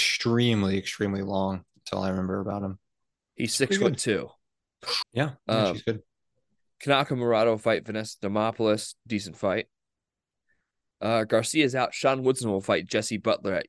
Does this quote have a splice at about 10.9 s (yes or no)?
no